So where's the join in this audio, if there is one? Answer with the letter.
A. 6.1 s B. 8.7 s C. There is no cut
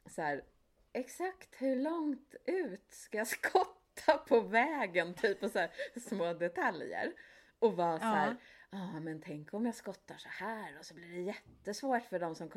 A